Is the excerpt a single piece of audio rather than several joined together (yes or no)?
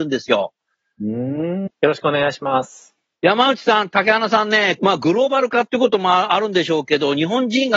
no